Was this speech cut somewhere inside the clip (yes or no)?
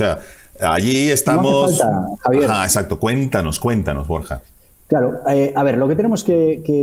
no